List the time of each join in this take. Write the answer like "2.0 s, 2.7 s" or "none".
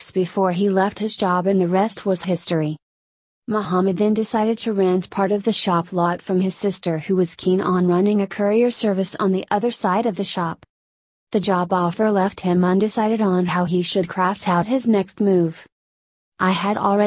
11.2 s

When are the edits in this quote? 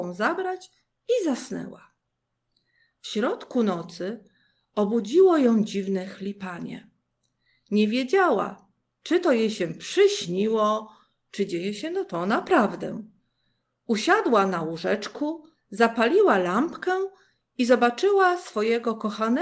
none

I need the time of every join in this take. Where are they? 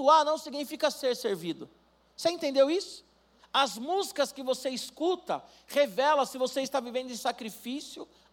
3.4 s

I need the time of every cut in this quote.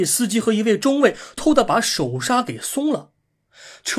1.4 s

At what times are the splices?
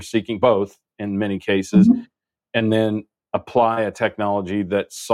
none

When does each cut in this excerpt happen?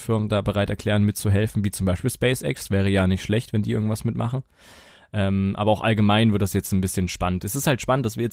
none

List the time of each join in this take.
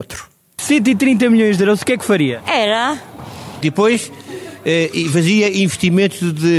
2.4 s, 3.6 s

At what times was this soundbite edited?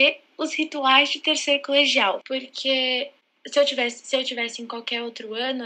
2.2 s

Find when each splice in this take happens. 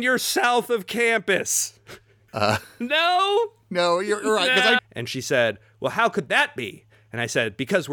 2.3 s, 4.8 s

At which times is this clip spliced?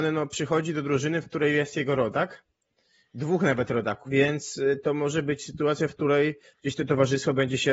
4.0 s

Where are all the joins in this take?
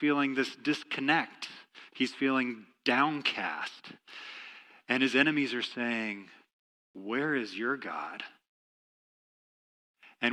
none

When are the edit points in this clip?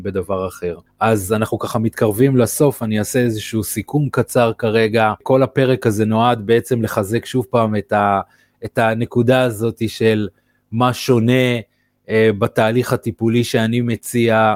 none

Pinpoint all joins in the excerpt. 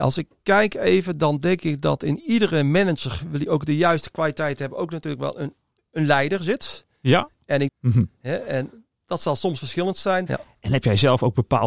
7.7 s, 10.3 s

